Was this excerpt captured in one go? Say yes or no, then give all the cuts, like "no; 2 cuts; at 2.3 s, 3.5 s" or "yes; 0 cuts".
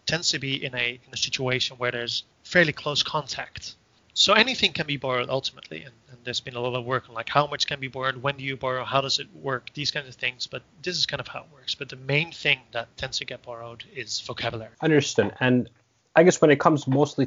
yes; 0 cuts